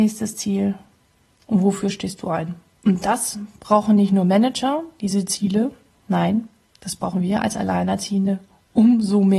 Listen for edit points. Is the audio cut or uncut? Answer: uncut